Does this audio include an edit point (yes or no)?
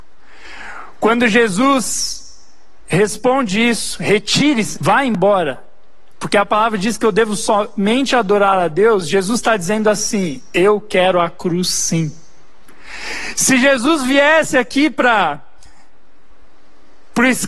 yes